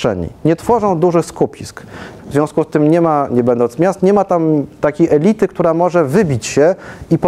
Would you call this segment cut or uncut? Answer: cut